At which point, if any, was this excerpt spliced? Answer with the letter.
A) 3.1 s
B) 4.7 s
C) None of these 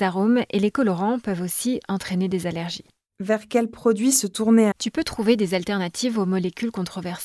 B